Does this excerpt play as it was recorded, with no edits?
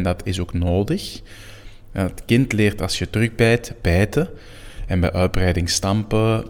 yes; 0 cuts

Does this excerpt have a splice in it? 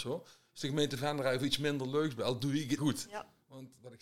yes; 1 cut; at 2.8 s

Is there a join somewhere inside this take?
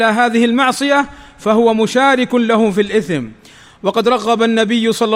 no; 0 cuts

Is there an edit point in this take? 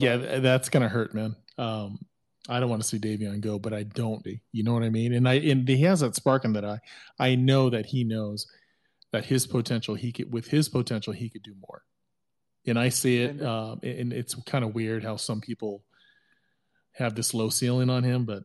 yes; 1 cut; at 4.2 s

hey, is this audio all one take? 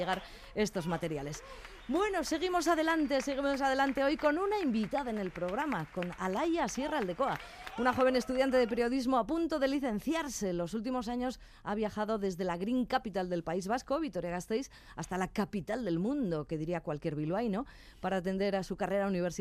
yes; 0 cuts

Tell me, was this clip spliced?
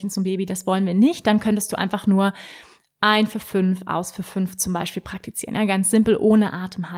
no; 0 cuts

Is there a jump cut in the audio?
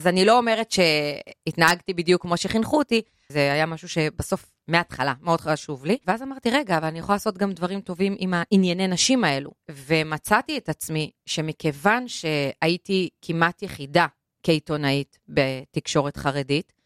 yes; 1 cut; at 3.3 s

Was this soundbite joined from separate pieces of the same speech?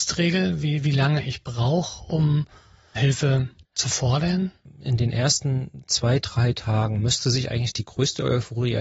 yes; 1 cut; at 3.0 s

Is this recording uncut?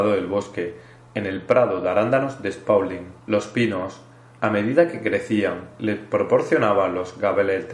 no; 1 cut; at 3.2 s

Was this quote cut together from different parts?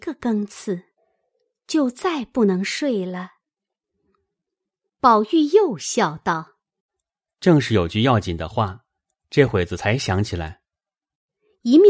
no; 0 cuts

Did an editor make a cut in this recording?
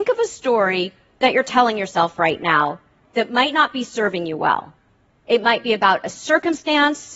no; 0 cuts

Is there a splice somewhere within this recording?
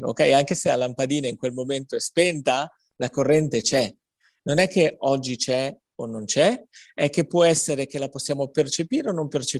yes; 1 cut; at 4.4 s

